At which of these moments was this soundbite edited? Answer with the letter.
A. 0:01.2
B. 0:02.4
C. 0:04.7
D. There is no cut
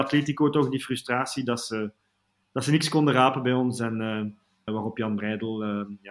C